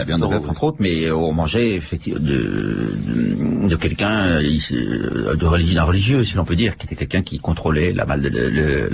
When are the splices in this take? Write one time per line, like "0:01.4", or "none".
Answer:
0:02.1